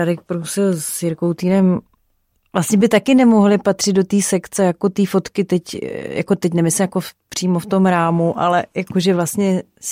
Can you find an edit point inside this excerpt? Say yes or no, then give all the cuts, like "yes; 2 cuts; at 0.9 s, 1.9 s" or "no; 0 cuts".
no; 0 cuts